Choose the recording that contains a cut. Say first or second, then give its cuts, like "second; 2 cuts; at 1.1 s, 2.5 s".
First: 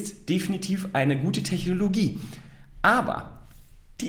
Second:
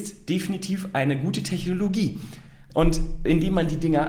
second; 1 cut; at 2.7 s